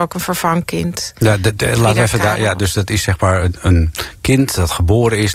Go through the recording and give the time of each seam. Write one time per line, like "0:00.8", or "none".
none

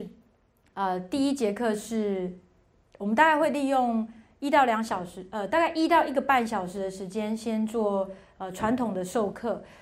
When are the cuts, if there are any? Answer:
none

